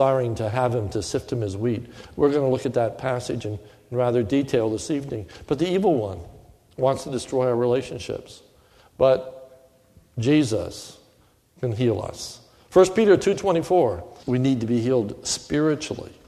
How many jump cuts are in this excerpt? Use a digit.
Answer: 1